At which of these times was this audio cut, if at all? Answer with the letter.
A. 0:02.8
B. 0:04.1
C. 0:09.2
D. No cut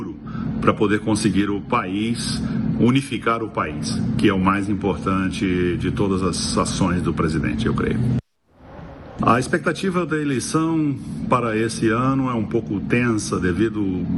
C